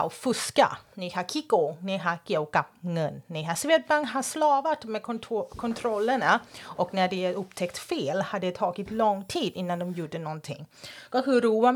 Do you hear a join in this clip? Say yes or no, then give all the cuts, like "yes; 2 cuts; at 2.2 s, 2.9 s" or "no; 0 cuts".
no; 0 cuts